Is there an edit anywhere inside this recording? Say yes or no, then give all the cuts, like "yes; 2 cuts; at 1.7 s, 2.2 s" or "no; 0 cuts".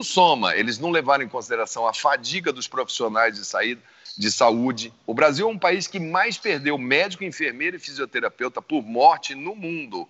no; 0 cuts